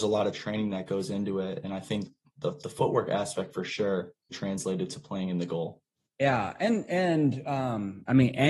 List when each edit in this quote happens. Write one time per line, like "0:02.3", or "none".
0:04.3
0:06.1